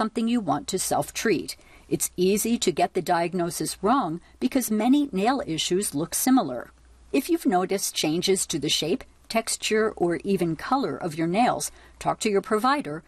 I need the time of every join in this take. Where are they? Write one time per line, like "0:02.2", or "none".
none